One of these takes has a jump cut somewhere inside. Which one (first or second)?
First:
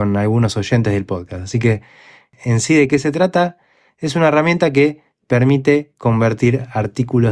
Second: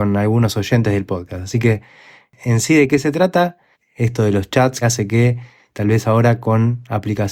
second